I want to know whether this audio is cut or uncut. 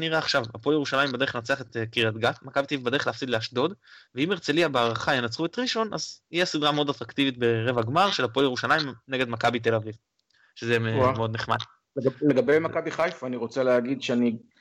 uncut